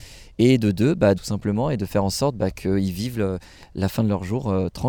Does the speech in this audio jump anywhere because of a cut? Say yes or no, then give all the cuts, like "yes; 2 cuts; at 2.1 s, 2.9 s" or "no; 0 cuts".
yes; 1 cut; at 1.2 s